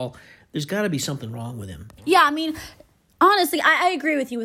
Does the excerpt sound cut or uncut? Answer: cut